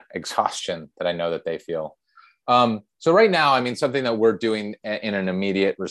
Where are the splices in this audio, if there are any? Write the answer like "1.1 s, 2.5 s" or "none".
none